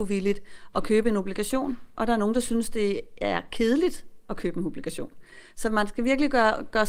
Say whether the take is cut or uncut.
uncut